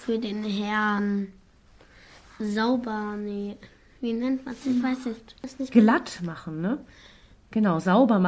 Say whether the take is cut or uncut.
uncut